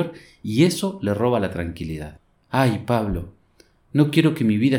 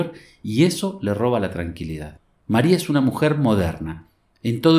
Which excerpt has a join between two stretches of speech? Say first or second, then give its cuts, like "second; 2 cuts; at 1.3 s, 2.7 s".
second; 1 cut; at 2.4 s